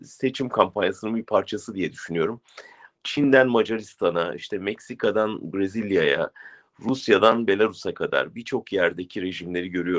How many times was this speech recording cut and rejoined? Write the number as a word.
one